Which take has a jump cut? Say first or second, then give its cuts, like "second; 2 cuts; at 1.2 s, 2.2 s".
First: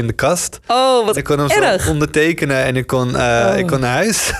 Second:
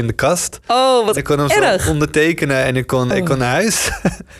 second; 1 cut; at 3.1 s